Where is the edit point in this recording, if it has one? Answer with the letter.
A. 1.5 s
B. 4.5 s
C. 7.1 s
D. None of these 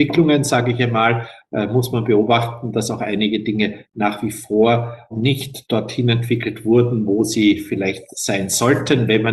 D